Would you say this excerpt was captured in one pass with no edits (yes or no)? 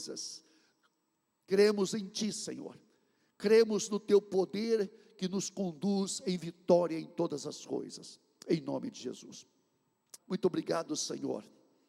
no